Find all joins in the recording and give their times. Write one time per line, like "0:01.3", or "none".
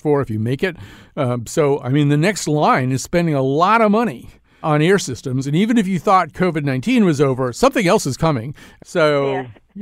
0:04.6
0:08.8